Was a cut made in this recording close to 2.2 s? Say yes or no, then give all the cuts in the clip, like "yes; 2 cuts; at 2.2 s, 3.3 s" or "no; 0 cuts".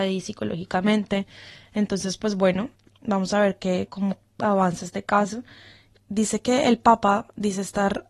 no; 2 cuts; at 3.9 s, 6.0 s